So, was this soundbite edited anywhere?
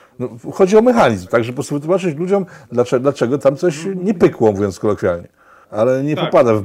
yes; 1 cut; at 5.6 s

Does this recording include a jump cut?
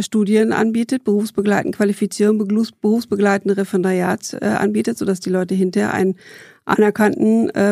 no; 0 cuts

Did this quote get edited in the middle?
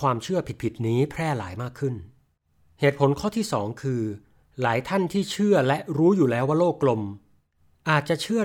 no; 0 cuts

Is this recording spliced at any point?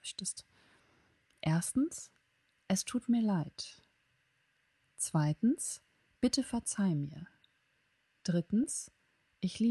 no; 0 cuts

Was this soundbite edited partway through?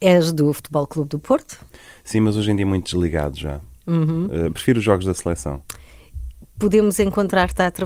no; 0 cuts

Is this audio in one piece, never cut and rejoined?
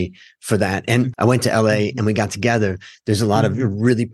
no; 2 cuts; at 1.1 s, 2.9 s

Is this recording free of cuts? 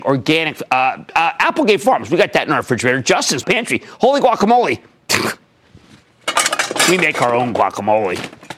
no; 2 cuts; at 1.1 s, 3.4 s

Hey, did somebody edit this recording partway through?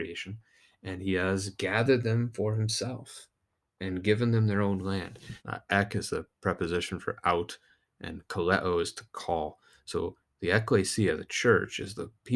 yes; 1 cut; at 5.4 s

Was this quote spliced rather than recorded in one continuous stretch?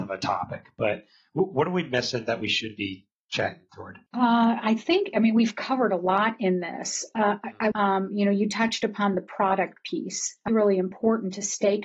yes; 3 cuts; at 4.1 s, 7.7 s, 10.5 s

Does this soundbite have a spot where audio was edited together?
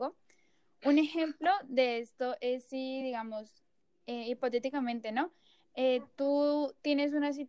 no; 0 cuts

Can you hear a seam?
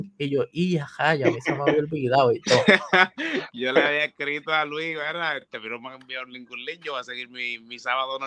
no; 0 cuts

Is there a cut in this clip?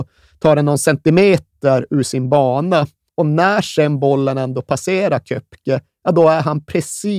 yes; 1 cut; at 3.1 s

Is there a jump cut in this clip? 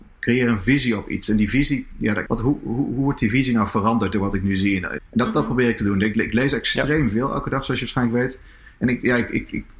yes; 3 cuts; at 2.3 s, 5.0 s, 6.1 s

